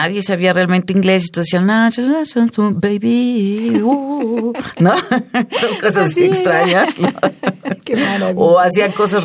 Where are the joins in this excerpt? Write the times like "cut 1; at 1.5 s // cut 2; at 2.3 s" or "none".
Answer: none